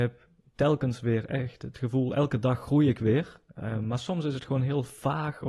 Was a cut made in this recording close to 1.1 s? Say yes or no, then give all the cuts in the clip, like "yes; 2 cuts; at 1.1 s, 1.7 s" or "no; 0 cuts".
no; 1 cut; at 3.5 s